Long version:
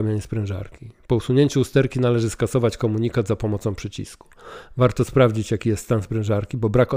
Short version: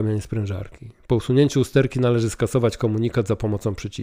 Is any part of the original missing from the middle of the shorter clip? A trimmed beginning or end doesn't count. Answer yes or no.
no